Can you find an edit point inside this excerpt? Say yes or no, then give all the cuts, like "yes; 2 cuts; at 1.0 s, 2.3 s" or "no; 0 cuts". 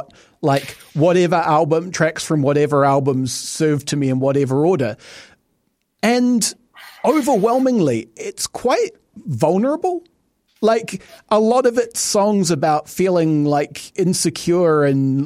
no; 0 cuts